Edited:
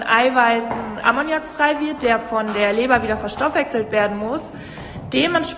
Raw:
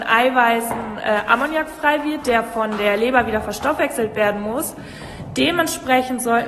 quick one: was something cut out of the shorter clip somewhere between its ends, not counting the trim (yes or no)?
yes